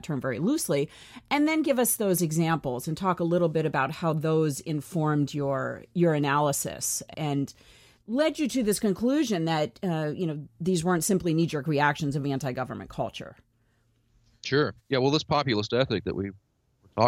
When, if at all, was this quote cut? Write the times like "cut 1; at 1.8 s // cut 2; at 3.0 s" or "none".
cut 1; at 14.8 s